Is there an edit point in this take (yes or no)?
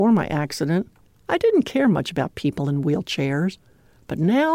no